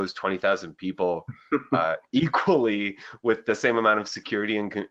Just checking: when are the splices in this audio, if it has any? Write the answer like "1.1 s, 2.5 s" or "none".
none